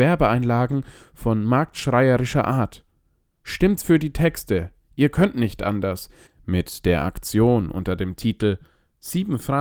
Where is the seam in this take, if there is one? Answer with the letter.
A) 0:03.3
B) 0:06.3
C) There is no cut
B